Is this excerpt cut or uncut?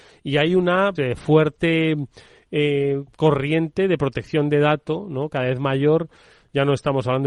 cut